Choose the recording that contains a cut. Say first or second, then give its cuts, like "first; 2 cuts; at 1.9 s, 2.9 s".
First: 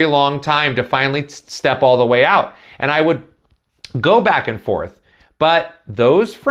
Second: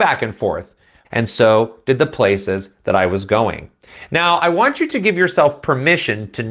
second; 1 cut; at 1.0 s